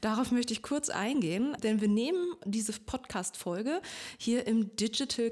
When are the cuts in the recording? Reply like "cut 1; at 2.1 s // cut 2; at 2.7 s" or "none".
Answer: cut 1; at 1.6 s